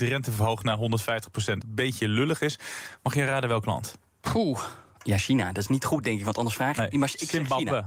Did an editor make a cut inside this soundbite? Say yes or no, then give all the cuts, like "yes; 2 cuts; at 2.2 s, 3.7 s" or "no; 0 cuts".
yes; 2 cuts; at 1.6 s, 5.0 s